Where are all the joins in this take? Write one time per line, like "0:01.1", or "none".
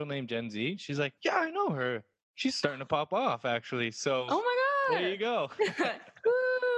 0:01.2